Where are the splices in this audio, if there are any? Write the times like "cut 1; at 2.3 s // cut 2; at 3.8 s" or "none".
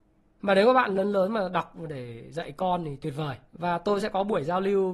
cut 1; at 3.5 s